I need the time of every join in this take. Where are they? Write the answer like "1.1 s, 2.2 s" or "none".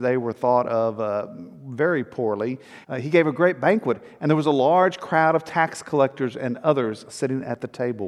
2.8 s